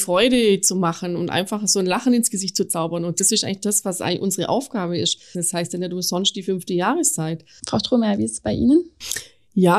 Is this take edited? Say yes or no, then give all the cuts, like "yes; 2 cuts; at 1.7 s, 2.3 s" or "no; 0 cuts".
yes; 2 cuts; at 5.3 s, 7.6 s